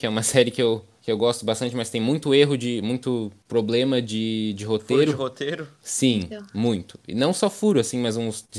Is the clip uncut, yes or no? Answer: yes